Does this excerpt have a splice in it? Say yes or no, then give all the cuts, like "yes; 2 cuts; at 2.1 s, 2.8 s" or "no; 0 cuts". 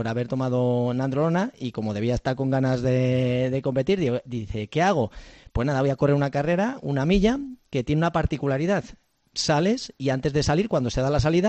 no; 0 cuts